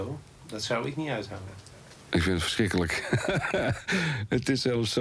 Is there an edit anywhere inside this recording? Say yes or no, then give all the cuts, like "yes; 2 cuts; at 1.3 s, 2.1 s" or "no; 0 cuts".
no; 0 cuts